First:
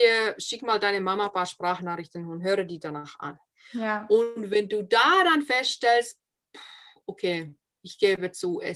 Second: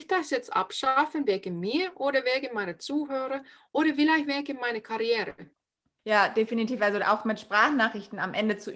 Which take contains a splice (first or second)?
second